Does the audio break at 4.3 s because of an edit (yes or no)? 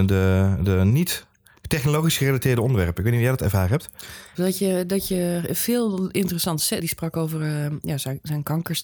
yes